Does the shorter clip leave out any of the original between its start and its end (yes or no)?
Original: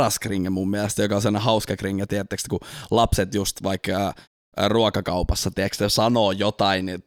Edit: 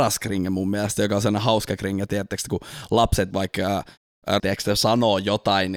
yes